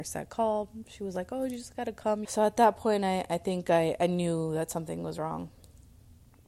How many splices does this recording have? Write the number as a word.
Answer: one